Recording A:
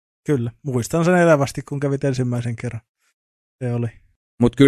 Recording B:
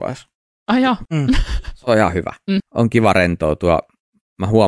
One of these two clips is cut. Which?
B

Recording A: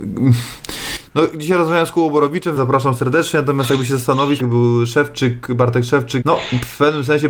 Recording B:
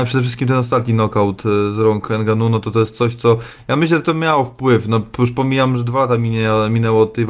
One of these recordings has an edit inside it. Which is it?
A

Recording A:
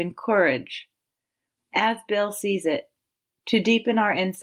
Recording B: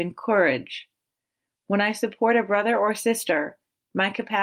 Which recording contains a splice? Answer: A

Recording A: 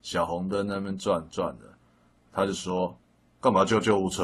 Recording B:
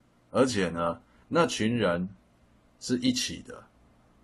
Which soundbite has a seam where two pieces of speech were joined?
B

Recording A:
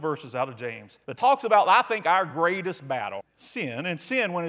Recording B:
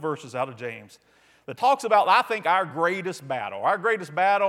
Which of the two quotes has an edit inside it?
A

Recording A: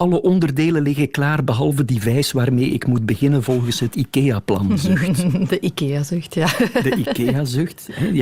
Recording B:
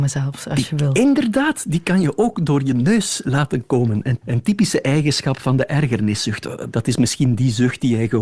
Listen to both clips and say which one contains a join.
B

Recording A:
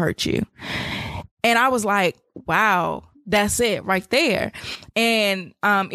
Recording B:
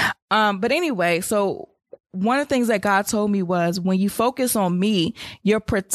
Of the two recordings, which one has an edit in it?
A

